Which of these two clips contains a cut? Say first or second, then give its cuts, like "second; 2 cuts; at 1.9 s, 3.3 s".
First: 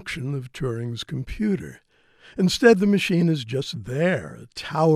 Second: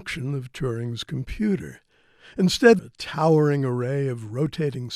second; 1 cut; at 2.8 s